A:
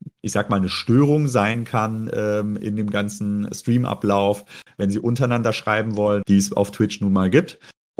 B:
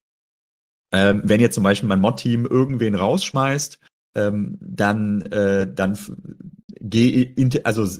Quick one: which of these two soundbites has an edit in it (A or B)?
A